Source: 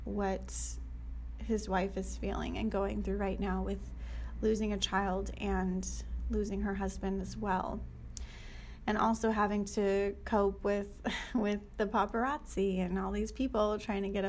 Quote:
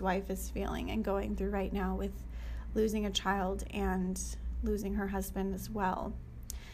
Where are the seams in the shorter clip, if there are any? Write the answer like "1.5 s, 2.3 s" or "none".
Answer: none